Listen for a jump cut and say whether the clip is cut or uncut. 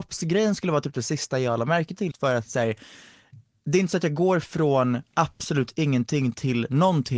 cut